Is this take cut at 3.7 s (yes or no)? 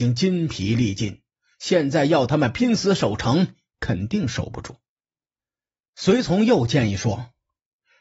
yes